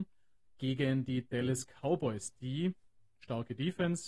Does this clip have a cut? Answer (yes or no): no